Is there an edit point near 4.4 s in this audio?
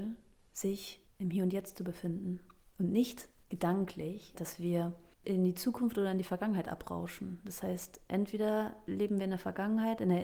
yes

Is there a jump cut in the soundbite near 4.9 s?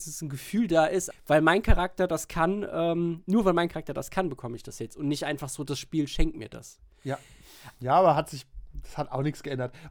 no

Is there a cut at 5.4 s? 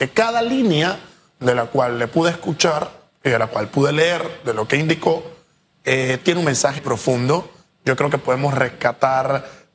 no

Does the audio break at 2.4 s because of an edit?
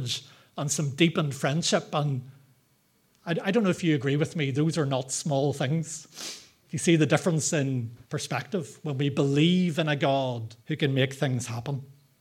no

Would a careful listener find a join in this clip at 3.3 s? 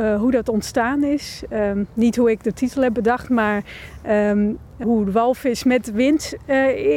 no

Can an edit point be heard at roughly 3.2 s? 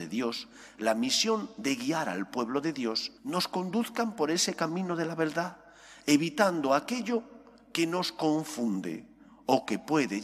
yes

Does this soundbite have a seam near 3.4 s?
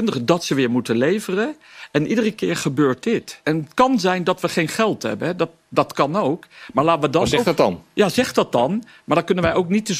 yes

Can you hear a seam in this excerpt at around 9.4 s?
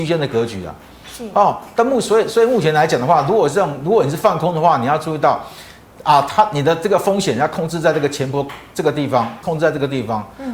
yes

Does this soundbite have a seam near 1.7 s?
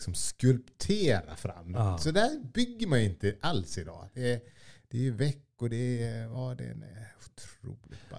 no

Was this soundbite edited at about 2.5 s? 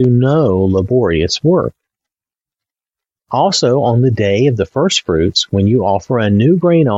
no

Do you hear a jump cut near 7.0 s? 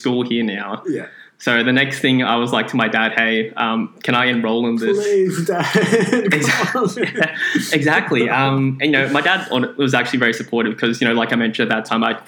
no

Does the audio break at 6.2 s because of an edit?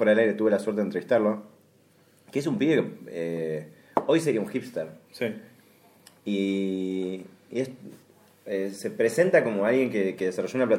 no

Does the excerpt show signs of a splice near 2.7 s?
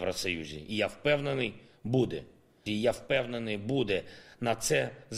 yes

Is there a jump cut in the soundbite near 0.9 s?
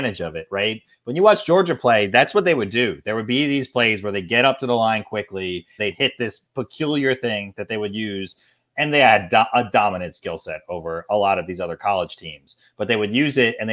no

